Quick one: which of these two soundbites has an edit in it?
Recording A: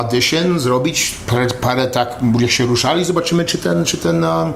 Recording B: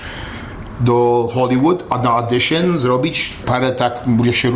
B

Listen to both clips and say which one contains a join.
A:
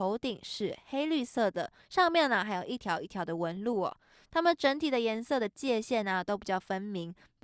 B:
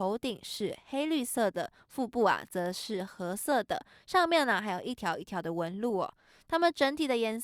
A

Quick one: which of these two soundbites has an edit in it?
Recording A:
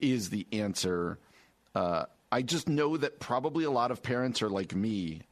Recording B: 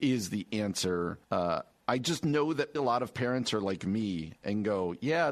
B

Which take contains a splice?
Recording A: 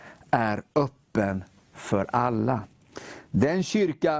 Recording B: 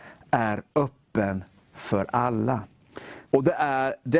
B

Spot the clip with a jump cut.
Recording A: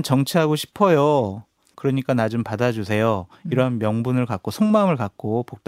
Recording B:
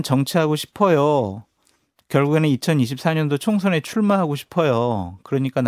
A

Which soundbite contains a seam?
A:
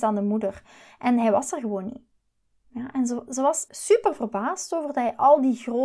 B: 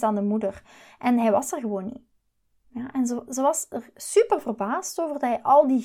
A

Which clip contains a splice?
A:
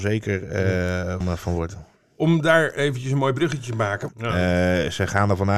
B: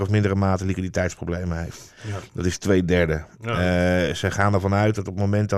A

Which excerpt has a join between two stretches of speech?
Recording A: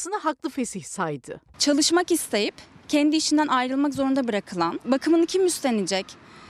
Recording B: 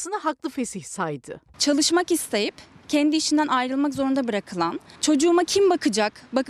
A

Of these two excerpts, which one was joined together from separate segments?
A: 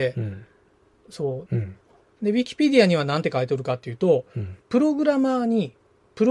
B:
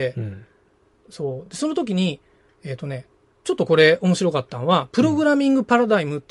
A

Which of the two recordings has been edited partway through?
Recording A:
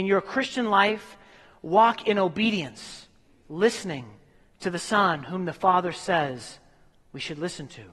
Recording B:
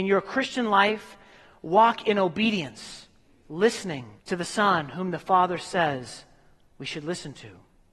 B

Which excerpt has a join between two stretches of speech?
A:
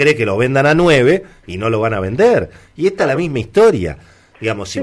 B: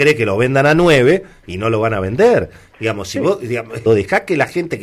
B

